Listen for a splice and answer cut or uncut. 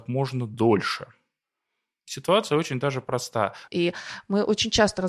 cut